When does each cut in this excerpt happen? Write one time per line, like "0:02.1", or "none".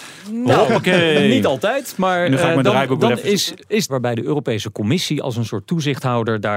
0:03.9